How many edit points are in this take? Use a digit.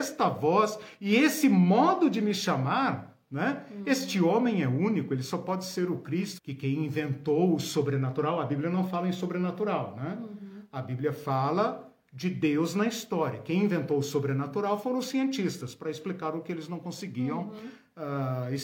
1